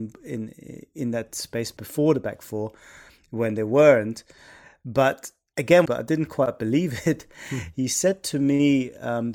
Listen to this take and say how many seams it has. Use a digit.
1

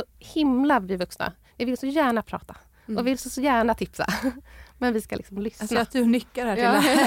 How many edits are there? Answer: 0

